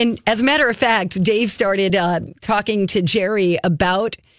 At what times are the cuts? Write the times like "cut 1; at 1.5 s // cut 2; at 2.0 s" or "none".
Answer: none

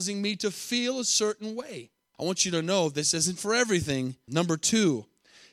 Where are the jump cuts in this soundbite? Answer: cut 1; at 2.1 s // cut 2; at 4.3 s

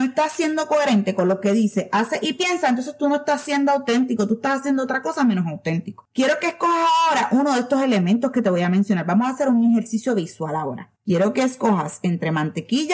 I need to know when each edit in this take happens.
none

